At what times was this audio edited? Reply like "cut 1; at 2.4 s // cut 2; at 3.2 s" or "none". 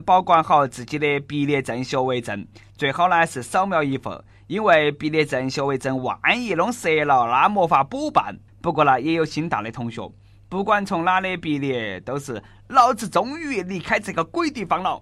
cut 1; at 8.5 s